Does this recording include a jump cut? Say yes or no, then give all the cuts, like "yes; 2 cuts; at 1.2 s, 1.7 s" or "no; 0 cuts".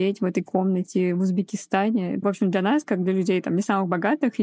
yes; 1 cut; at 2.2 s